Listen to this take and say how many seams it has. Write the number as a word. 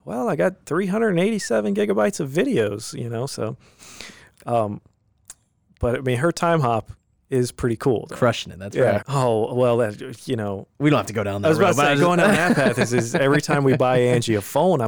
one